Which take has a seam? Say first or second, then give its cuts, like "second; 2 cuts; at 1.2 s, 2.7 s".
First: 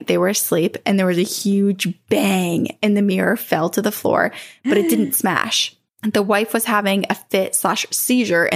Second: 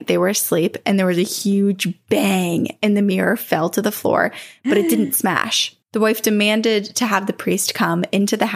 second; 1 cut; at 5.8 s